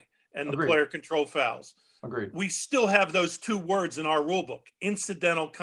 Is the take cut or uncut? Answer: uncut